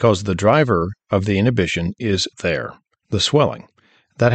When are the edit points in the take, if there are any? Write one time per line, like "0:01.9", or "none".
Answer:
0:02.3